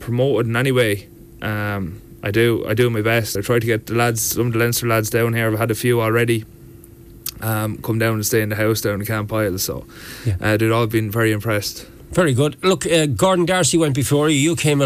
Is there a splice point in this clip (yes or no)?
no